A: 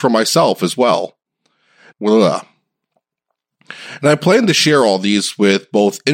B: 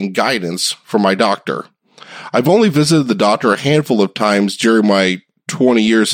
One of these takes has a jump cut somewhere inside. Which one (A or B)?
A